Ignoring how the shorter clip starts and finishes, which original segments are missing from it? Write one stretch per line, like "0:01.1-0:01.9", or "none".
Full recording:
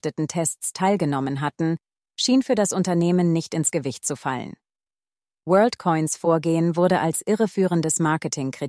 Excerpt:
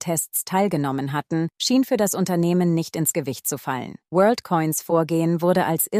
0:01.8-0:02.1
0:04.6-0:05.4